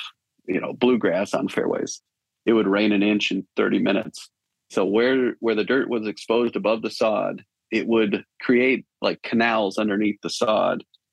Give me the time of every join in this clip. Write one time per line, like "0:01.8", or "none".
0:04.7